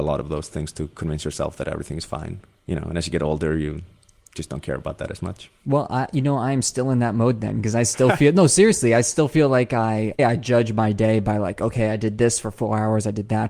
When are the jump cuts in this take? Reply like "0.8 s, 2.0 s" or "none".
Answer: 10.2 s